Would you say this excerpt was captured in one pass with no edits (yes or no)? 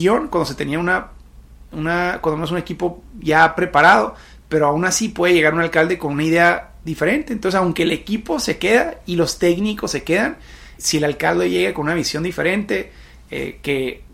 no